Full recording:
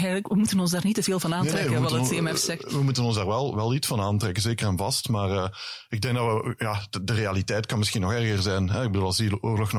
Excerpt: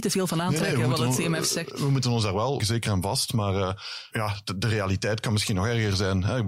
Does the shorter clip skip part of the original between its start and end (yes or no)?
yes